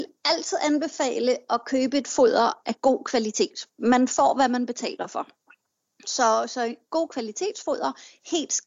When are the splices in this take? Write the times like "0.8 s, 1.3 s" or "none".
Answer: 2.6 s